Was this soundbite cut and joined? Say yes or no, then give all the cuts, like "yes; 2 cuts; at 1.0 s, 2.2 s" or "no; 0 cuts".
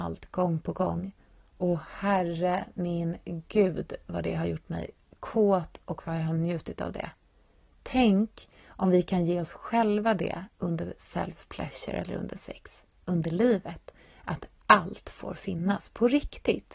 no; 0 cuts